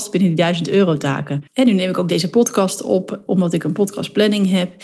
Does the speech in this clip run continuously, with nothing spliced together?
no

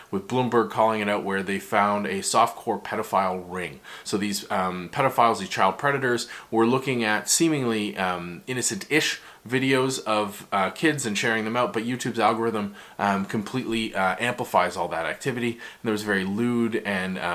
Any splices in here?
no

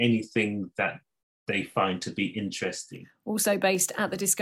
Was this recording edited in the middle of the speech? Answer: no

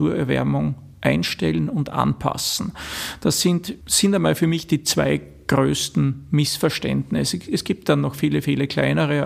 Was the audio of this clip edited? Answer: yes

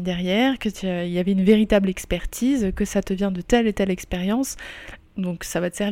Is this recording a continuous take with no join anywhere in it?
no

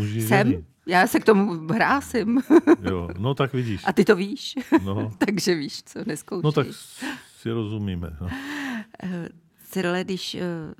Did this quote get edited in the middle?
no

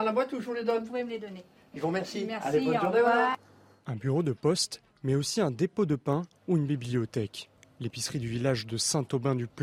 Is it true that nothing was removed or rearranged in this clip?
yes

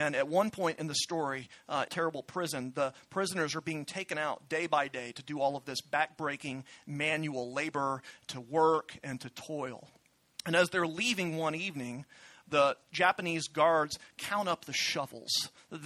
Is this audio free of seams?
no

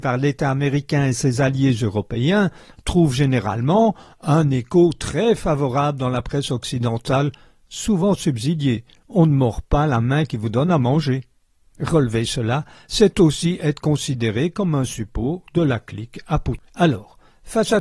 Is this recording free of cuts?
yes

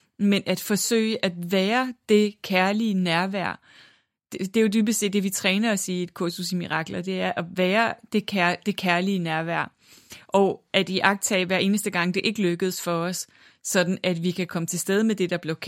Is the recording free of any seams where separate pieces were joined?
yes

